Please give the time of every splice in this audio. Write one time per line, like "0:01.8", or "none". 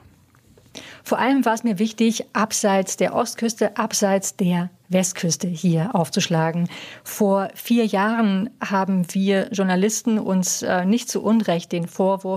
none